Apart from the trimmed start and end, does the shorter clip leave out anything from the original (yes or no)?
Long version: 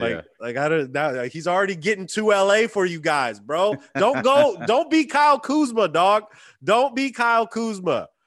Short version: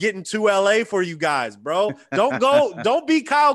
no